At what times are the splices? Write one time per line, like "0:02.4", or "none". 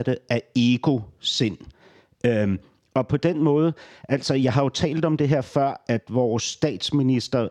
none